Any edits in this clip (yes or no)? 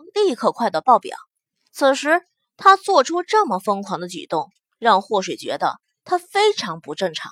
yes